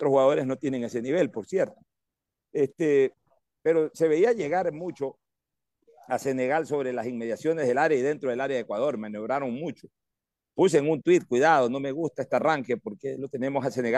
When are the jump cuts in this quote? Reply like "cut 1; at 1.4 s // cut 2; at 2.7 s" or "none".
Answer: none